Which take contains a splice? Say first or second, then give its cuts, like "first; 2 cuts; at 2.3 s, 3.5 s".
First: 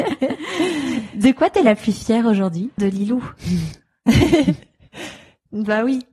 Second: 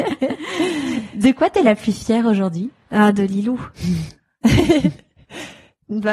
first; 1 cut; at 2.8 s